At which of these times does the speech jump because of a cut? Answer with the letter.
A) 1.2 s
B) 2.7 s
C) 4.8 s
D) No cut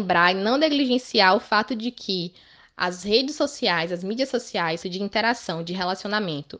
C